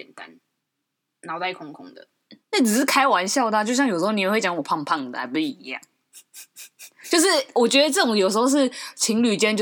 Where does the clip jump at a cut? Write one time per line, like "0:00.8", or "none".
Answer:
none